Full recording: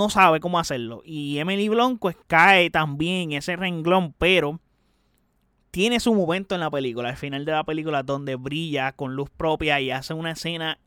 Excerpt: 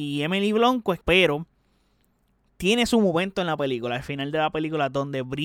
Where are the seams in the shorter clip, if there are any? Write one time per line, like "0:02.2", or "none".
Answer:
0:01.0